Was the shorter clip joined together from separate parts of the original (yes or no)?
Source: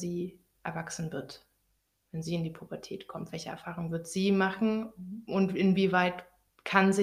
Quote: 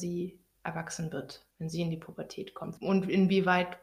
yes